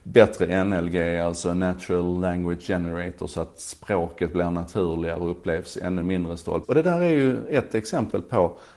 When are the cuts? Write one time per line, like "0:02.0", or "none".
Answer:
0:06.6